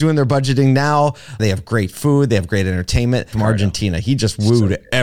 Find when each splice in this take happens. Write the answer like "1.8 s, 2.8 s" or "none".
1.4 s, 3.3 s